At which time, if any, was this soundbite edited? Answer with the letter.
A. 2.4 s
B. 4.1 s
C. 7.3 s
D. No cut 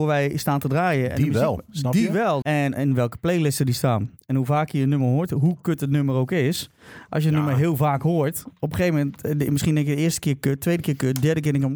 A